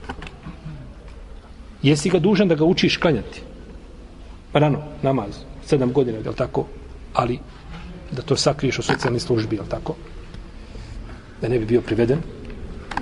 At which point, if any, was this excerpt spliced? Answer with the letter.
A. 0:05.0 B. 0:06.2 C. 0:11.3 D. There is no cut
B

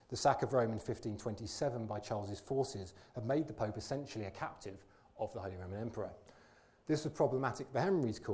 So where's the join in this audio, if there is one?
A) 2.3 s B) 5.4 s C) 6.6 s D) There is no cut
D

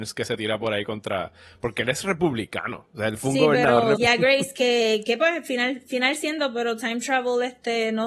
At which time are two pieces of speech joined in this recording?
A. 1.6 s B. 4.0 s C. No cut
B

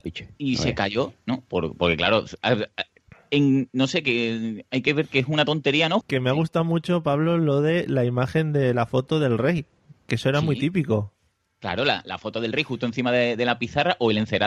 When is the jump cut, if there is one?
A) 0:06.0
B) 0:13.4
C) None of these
A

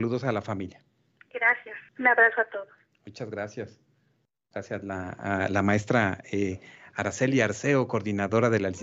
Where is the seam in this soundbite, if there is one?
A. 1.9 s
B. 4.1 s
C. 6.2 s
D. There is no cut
A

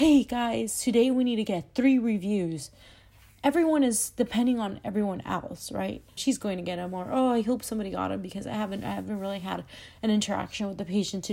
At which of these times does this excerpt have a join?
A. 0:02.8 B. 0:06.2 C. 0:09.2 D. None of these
B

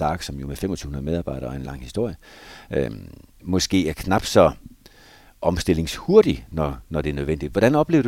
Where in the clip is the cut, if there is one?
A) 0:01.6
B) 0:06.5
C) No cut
A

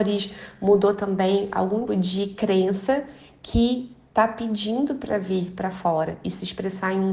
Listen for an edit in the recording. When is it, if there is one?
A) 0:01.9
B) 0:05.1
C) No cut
A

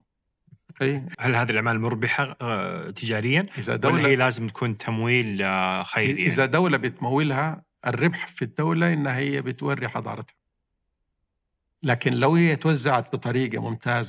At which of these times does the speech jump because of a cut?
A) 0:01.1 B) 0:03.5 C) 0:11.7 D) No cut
A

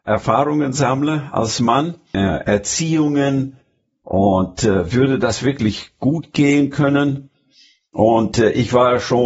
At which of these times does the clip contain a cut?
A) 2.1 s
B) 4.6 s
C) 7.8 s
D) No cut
A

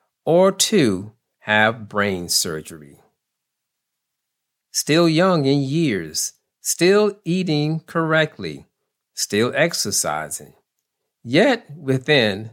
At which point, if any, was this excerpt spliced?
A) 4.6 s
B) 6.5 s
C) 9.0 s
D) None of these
A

